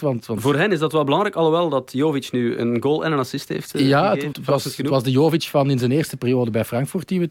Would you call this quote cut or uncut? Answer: cut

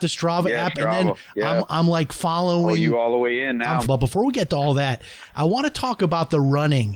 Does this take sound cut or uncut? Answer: cut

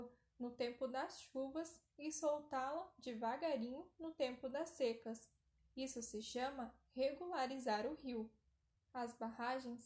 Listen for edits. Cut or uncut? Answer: cut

